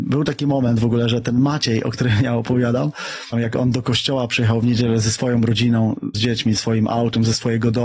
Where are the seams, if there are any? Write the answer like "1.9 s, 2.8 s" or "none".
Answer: 3.3 s, 6.1 s